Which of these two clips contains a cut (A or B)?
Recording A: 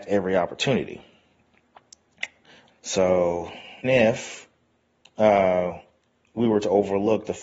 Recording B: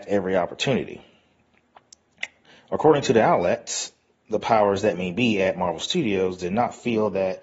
A